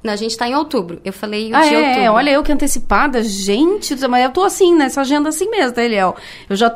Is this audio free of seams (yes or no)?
yes